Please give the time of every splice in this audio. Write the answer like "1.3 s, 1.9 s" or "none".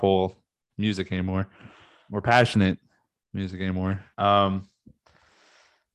2.1 s, 4.1 s